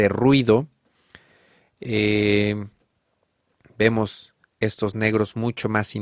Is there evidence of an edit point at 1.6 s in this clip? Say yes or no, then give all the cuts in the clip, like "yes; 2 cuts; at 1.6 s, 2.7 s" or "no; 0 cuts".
no; 0 cuts